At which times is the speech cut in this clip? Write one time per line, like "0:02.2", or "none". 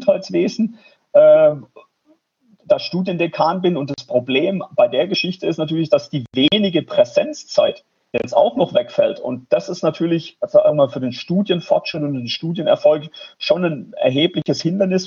none